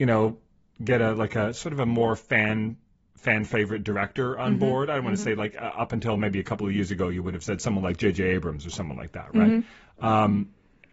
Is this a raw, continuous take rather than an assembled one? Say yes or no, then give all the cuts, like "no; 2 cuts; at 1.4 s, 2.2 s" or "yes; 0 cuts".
yes; 0 cuts